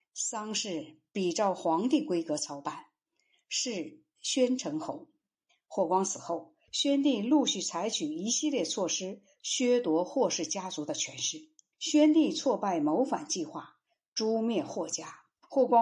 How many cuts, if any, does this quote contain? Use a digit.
1